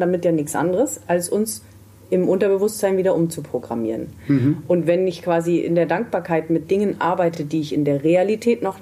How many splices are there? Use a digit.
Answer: 0